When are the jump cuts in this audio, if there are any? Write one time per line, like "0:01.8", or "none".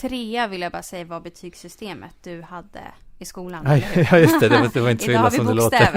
none